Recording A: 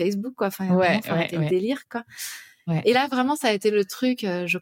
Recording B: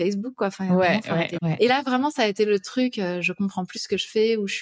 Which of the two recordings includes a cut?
B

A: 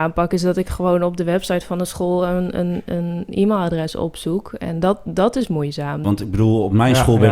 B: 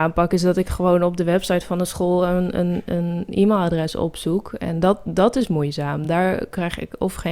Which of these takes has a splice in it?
A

